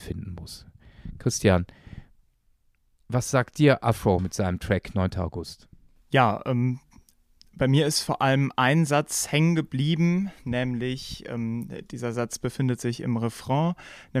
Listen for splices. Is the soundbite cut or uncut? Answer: uncut